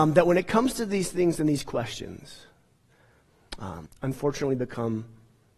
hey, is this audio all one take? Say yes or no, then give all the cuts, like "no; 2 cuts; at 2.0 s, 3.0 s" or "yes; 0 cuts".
no; 1 cut; at 3.9 s